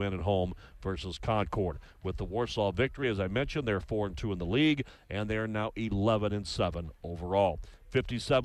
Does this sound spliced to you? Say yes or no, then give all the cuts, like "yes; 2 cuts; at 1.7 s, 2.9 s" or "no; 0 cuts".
no; 0 cuts